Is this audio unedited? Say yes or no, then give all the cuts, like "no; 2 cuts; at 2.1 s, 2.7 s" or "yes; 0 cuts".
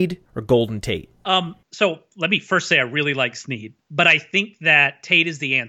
yes; 0 cuts